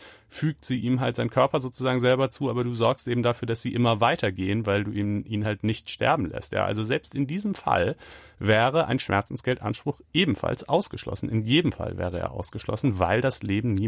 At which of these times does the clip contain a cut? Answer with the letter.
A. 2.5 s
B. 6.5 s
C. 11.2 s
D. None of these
D